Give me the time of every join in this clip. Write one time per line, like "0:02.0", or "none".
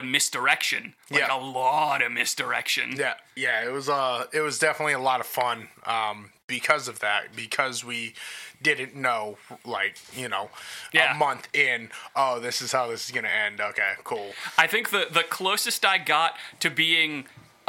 0:03.4

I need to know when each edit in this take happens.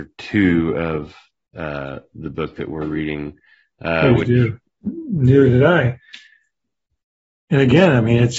0:04.7

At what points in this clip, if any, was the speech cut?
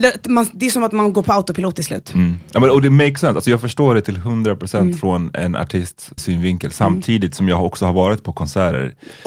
0:06.2

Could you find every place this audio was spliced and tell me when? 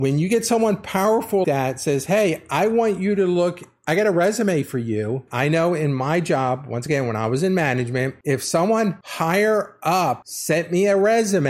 0:01.4
0:05.3

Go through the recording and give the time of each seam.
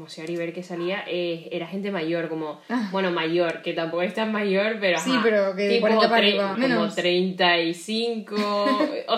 0:06.5

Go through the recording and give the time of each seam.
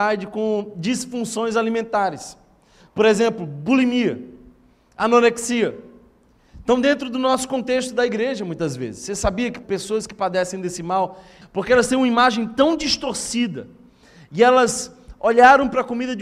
0:09.6
0:11.4

